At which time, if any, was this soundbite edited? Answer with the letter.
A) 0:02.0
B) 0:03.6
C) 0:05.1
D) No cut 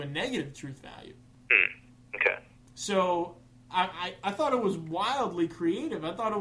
D